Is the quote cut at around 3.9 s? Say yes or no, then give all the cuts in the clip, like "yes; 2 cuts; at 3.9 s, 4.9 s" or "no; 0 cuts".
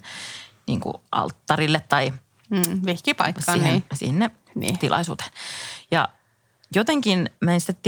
yes; 1 cut; at 3.9 s